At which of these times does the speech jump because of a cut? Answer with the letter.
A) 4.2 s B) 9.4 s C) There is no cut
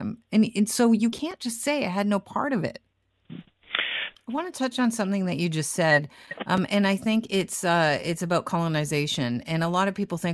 A